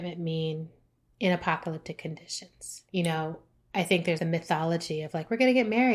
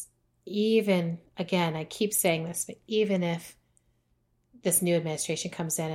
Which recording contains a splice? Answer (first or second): first